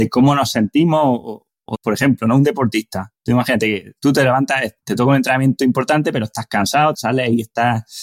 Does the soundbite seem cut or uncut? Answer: cut